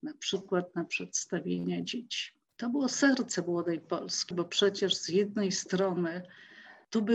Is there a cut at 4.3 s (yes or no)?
yes